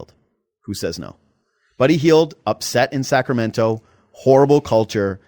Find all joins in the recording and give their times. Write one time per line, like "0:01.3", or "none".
none